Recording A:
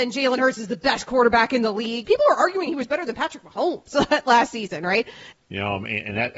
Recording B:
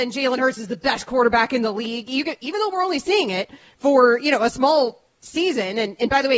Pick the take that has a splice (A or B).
A